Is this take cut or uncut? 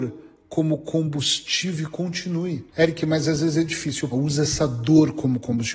cut